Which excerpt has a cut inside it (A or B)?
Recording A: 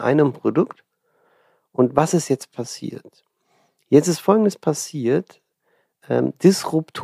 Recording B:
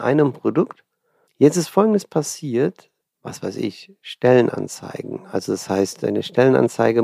B